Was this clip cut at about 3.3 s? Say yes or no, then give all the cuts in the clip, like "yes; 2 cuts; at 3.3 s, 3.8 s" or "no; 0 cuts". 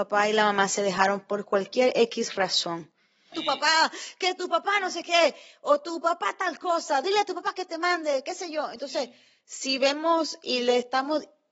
yes; 1 cut; at 3.3 s